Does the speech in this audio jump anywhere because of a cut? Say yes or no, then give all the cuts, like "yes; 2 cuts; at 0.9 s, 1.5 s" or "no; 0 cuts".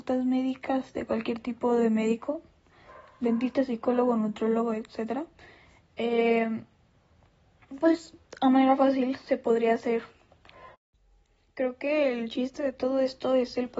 no; 0 cuts